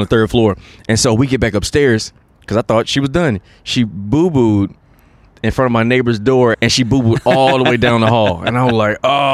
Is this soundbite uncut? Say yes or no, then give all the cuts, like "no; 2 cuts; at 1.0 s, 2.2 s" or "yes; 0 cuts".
no; 1 cut; at 6.5 s